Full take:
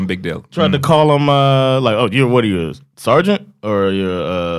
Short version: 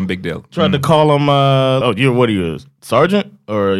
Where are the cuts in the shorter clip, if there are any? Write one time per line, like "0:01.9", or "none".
0:01.8